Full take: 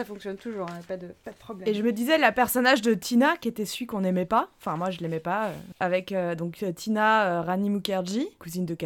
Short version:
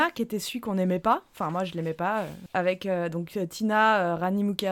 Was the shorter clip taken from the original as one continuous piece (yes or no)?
yes